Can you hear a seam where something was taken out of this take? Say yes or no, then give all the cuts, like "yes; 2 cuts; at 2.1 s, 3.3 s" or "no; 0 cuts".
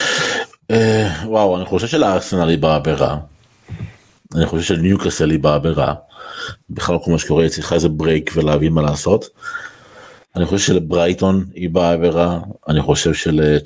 yes; 1 cut; at 6.6 s